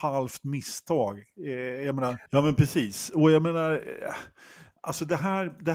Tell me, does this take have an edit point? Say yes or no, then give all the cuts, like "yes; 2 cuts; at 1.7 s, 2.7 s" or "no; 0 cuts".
yes; 1 cut; at 2.3 s